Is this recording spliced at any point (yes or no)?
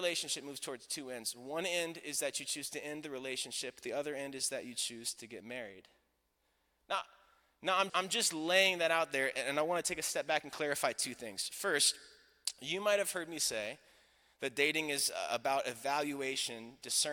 yes